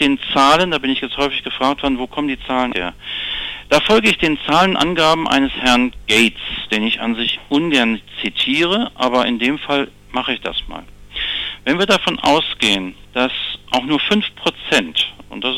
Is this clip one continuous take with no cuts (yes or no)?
no